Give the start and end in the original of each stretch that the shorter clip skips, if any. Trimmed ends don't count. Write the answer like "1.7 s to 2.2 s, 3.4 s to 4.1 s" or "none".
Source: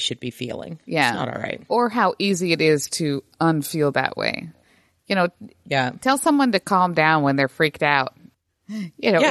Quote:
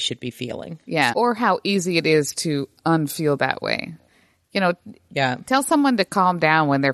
1.1 s to 1.7 s